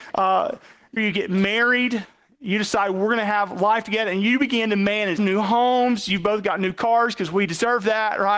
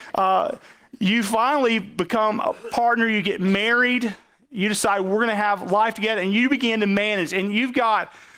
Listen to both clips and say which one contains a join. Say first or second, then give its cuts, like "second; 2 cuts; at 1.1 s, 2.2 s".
first; 2 cuts; at 1.0 s, 5.2 s